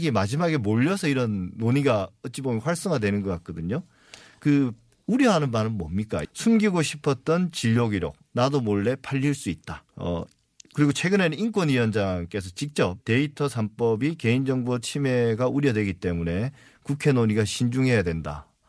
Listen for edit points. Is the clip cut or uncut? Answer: cut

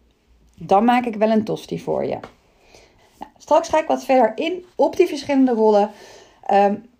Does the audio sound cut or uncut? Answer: cut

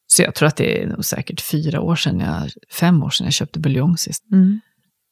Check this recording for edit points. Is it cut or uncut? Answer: cut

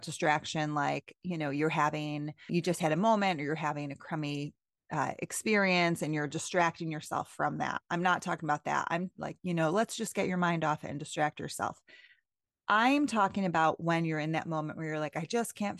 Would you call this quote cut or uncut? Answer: cut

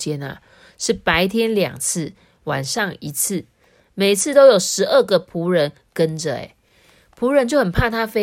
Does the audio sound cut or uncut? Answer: uncut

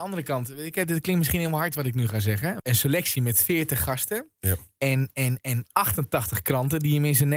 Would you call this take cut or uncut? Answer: cut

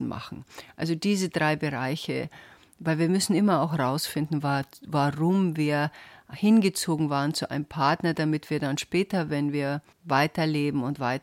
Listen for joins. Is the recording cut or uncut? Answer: cut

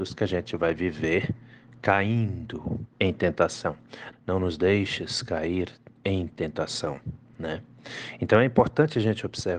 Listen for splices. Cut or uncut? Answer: cut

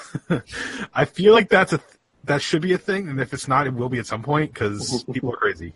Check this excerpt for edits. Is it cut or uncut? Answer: uncut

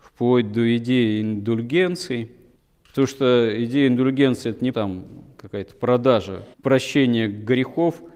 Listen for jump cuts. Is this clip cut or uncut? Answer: cut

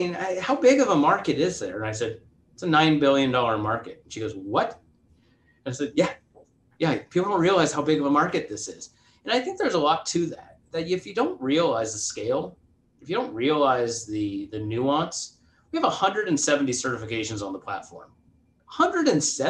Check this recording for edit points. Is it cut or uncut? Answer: uncut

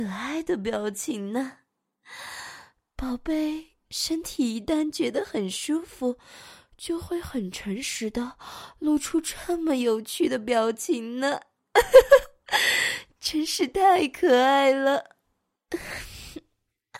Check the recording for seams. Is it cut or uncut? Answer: uncut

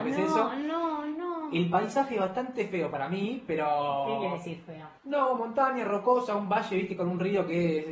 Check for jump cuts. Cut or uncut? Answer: cut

